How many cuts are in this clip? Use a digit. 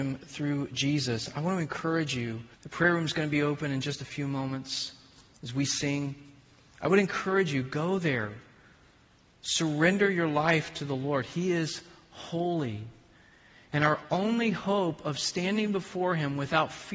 1